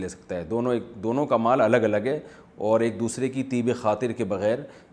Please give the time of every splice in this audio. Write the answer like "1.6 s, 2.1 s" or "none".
none